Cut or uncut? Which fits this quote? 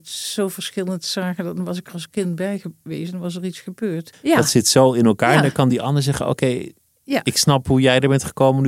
cut